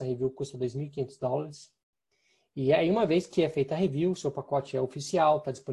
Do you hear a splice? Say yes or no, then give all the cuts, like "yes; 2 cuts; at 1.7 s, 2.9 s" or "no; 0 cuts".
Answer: no; 0 cuts